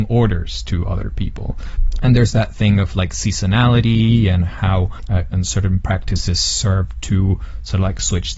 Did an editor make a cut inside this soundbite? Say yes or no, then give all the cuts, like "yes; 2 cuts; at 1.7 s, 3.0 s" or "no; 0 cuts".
yes; 1 cut; at 5.3 s